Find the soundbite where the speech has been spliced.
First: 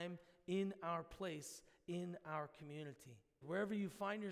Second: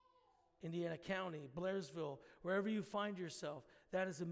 first; 1 cut; at 3.4 s

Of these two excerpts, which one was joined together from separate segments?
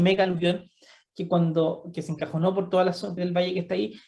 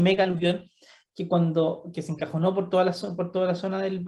first; 1 cut; at 3.2 s

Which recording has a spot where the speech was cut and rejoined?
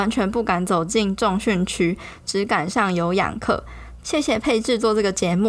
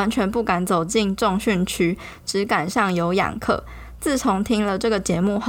first; 1 cut; at 4.0 s

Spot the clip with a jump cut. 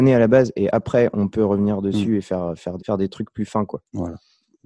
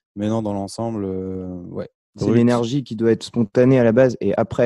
first; 1 cut; at 2.8 s

